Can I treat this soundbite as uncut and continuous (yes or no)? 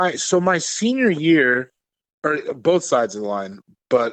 no